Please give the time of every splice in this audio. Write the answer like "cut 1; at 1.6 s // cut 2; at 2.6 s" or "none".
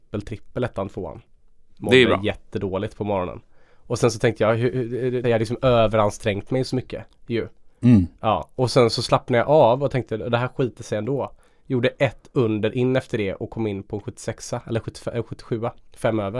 cut 1; at 5.2 s